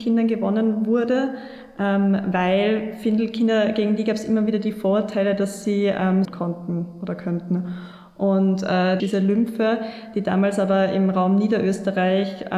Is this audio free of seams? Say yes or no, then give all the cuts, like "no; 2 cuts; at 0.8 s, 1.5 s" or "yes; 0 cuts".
no; 2 cuts; at 6.2 s, 9.0 s